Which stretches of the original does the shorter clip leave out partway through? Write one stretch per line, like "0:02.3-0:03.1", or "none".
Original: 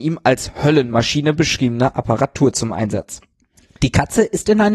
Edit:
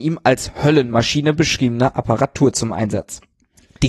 none